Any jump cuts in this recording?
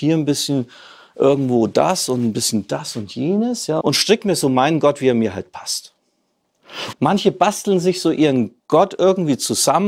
yes; 2 cuts; at 3.8 s, 6.9 s

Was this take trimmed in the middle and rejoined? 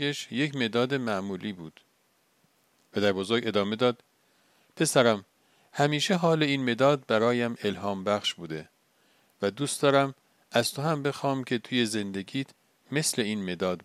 no; 0 cuts

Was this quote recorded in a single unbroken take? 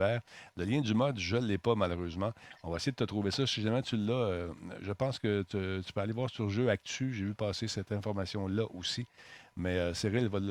yes; 0 cuts

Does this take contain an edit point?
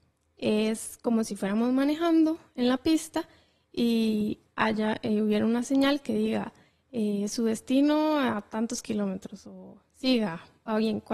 no; 0 cuts

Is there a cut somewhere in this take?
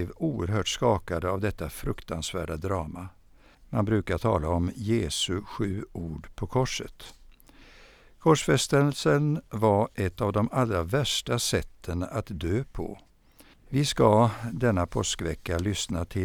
yes; 2 cuts; at 3.5 s, 13.5 s

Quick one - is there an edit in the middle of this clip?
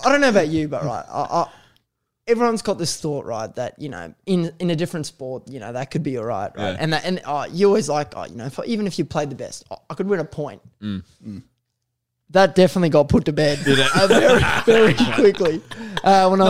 no; 0 cuts

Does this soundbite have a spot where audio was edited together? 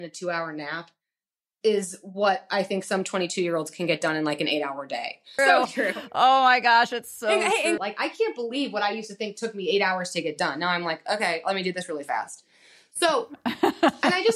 yes; 2 cuts; at 5.4 s, 7.8 s

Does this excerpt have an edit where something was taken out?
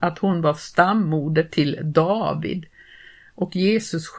no; 0 cuts

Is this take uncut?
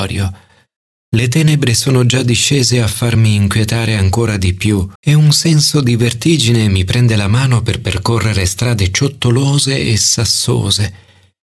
no; 2 cuts; at 1.0 s, 5.0 s

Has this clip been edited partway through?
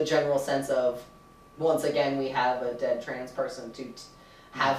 no; 0 cuts

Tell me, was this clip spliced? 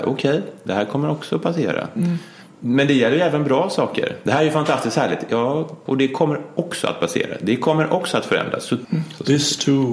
yes; 2 cuts; at 5.9 s, 8.8 s

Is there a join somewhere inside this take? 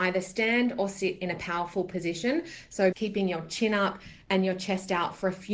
yes; 1 cut; at 2.9 s

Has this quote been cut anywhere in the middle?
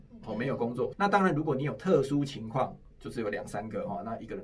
yes; 2 cuts; at 0.9 s, 2.9 s

